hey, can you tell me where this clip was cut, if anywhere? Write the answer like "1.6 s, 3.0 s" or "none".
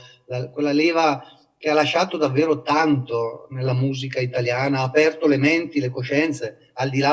none